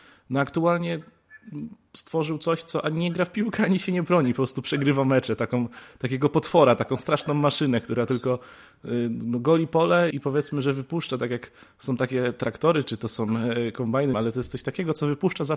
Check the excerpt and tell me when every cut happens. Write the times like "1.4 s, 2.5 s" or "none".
10.1 s, 14.1 s

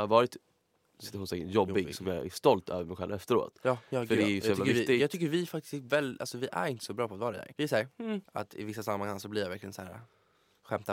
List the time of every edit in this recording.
8.2 s

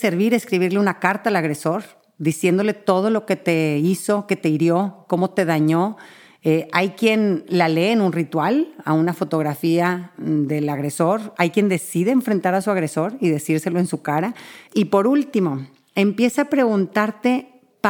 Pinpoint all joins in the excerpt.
14.7 s

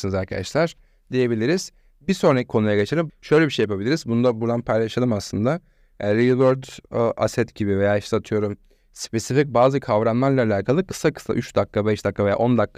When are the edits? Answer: 3.1 s

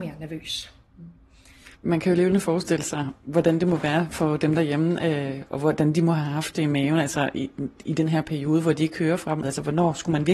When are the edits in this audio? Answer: 1.7 s, 9.4 s

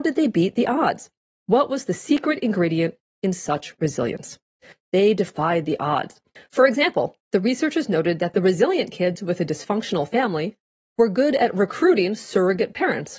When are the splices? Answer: 4.7 s, 6.4 s

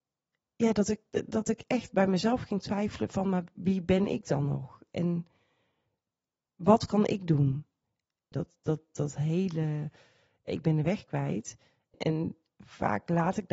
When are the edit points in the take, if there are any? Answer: 8.3 s, 11.9 s

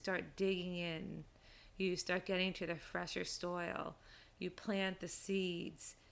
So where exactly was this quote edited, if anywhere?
none

